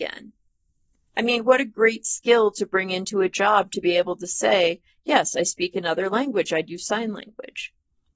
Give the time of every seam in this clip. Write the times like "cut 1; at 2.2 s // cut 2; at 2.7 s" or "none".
none